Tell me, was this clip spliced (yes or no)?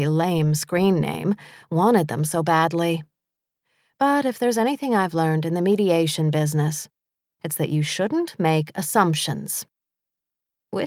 no